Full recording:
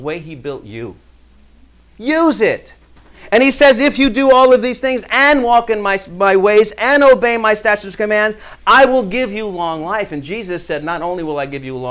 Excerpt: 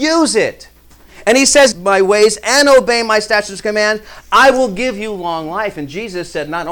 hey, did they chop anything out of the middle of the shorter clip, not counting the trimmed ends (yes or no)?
yes